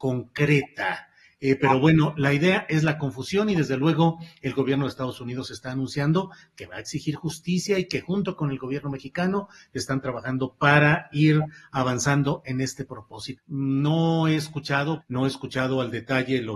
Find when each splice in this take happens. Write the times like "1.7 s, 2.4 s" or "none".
13.4 s, 15.0 s